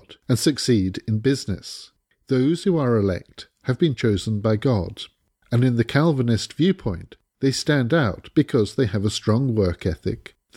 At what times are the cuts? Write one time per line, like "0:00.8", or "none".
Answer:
0:02.2